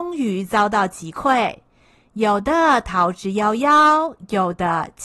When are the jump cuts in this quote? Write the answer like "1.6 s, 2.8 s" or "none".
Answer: none